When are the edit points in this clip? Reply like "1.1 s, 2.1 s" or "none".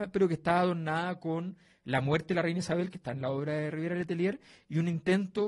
none